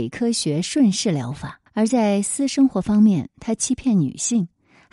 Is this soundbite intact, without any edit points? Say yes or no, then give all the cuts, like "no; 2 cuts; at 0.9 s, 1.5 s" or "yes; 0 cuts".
no; 1 cut; at 1.7 s